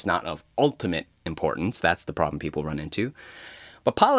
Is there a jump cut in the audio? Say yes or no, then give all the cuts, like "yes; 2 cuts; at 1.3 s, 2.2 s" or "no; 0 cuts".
no; 0 cuts